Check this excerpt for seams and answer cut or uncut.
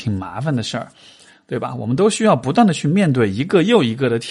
uncut